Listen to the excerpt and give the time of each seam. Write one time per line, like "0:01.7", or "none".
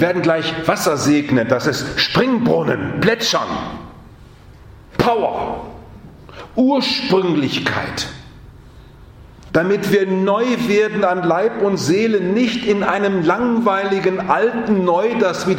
0:09.5